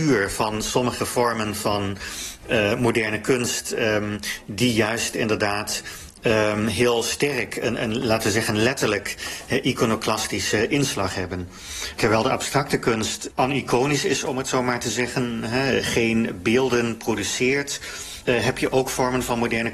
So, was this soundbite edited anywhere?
no; 0 cuts

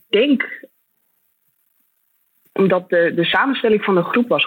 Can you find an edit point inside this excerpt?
no; 0 cuts

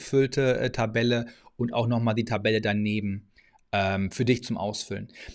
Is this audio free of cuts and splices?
yes; 0 cuts

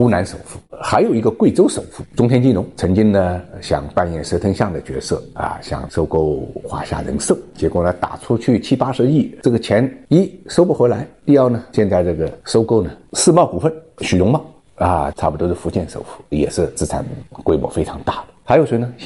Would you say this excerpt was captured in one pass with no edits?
no; 2 cuts; at 13.1 s, 15.1 s

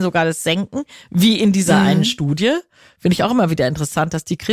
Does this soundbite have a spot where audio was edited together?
no; 0 cuts

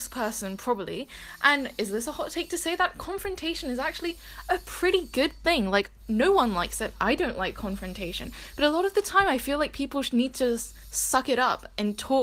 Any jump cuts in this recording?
no; 0 cuts

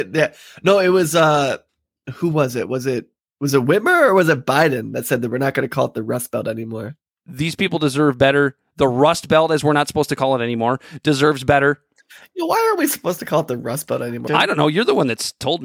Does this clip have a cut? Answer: yes; 2 cuts; at 7.2 s, 14.3 s

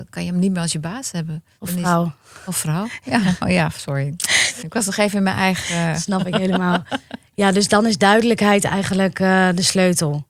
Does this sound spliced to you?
yes; 1 cut; at 4.6 s

